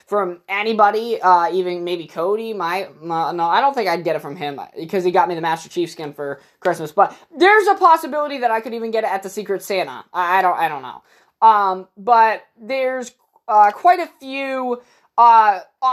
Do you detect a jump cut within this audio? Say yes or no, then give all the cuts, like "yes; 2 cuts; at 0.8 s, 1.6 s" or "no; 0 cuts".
no; 0 cuts